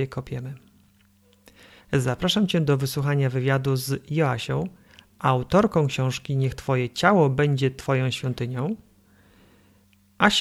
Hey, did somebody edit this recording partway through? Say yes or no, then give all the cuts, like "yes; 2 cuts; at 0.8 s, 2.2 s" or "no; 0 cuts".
yes; 1 cut; at 1.8 s